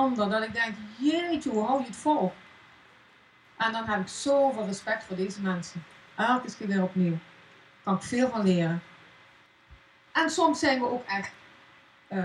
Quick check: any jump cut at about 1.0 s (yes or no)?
no